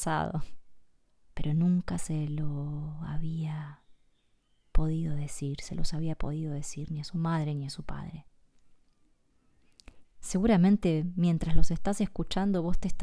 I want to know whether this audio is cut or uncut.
cut